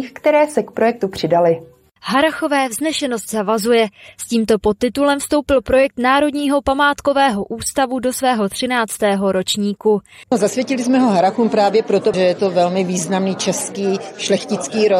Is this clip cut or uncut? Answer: cut